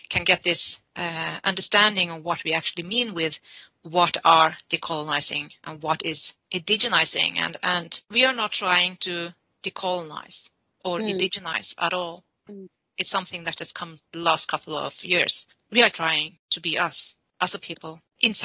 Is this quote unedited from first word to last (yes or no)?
no